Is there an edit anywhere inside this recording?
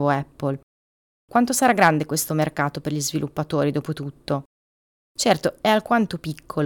no; 0 cuts

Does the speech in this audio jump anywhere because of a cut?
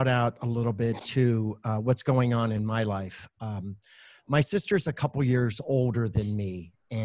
no; 0 cuts

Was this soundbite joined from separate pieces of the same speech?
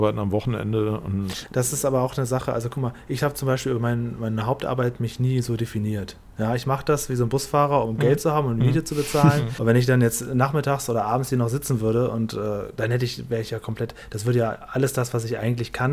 yes; 3 cuts; at 1.5 s, 7.9 s, 9.6 s

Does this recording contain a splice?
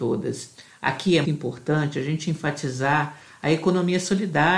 yes; 1 cut; at 1.2 s

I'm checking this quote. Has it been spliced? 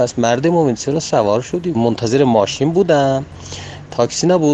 yes; 1 cut; at 1.7 s

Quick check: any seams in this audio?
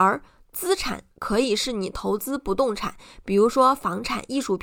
yes; 1 cut; at 1.1 s

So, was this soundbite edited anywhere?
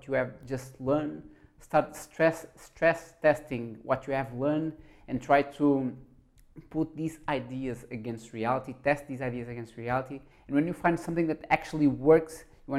yes; 1 cut; at 10.3 s

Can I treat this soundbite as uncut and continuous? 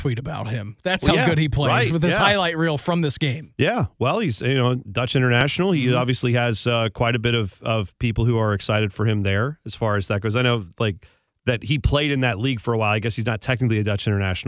yes; 0 cuts

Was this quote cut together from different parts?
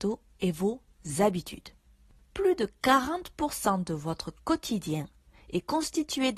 no; 0 cuts

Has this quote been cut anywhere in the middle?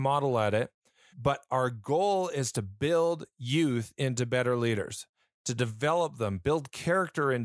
yes; 1 cut; at 1.1 s

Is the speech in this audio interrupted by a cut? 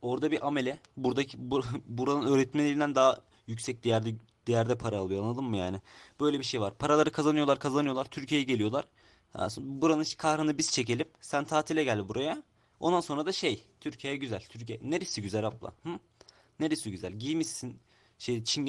no; 0 cuts

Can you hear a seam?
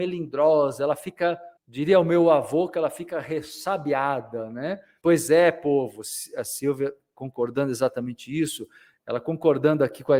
yes; 3 cuts; at 1.6 s, 5.0 s, 9.0 s

